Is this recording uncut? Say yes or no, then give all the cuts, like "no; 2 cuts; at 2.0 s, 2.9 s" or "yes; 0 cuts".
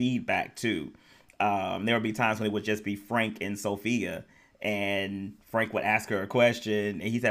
yes; 0 cuts